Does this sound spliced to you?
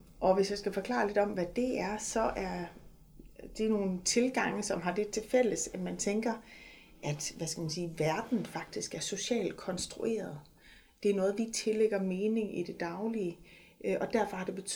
no; 0 cuts

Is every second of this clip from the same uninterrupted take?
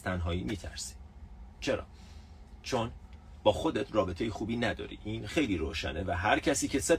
no; 1 cut; at 5.3 s

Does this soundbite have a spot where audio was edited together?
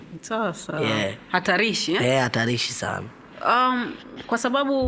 no; 0 cuts

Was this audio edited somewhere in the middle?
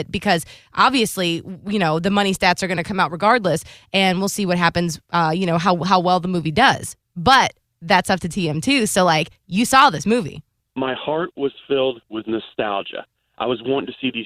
no; 0 cuts

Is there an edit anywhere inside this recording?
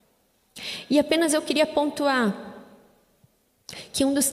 no; 0 cuts

